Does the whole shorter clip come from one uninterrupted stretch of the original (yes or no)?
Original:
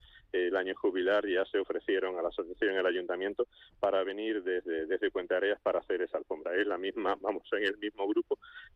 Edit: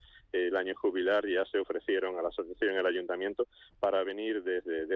yes